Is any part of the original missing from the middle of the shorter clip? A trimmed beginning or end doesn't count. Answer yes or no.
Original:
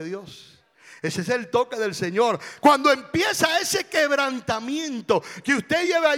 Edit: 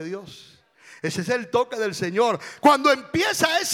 no